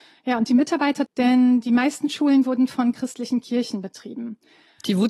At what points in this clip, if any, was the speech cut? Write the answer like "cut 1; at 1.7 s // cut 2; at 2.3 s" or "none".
cut 1; at 1.1 s